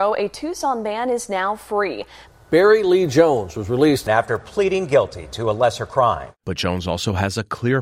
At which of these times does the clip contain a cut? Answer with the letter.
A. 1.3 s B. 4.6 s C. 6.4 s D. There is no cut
C